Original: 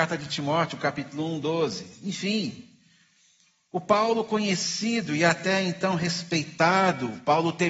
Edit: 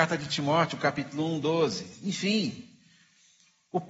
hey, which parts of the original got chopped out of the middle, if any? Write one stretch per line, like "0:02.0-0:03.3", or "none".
none